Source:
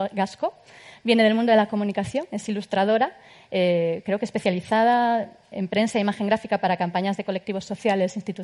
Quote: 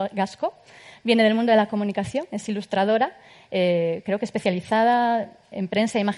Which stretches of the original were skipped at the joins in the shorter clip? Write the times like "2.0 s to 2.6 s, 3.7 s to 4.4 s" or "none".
none